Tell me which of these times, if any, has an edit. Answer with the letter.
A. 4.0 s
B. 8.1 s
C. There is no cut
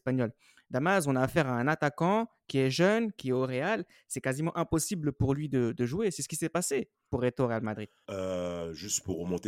B